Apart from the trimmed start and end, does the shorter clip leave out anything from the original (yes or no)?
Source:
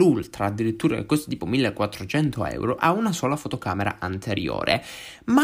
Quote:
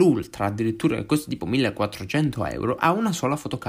no